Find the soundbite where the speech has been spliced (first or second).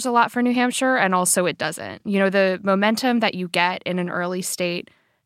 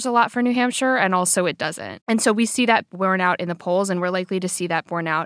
second